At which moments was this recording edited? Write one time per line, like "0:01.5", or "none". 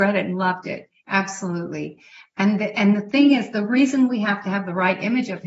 0:01.0